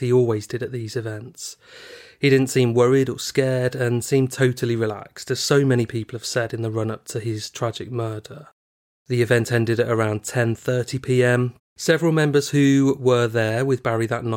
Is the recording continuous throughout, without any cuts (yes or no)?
no